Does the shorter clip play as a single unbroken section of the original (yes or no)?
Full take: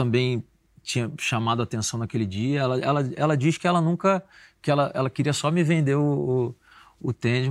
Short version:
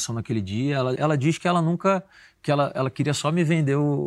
no